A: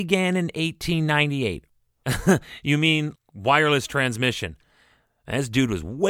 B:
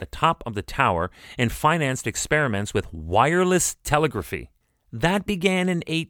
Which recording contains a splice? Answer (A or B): A